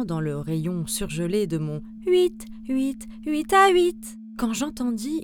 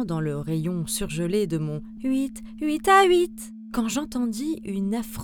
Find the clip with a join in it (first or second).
second